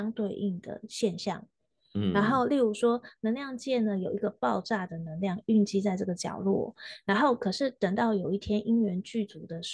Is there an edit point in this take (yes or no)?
no